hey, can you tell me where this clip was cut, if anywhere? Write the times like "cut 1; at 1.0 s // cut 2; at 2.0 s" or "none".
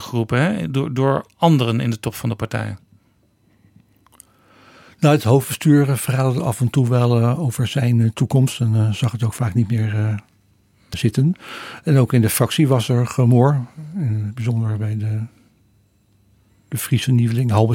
cut 1; at 10.9 s